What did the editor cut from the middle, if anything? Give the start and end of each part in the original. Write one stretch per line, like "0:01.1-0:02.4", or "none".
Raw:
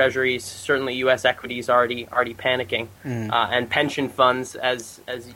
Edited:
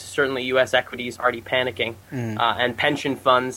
0:01.7-0:02.1